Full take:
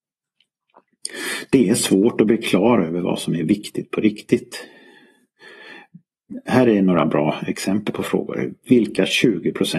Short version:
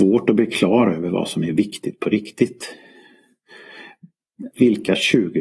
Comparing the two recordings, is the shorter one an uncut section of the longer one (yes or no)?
no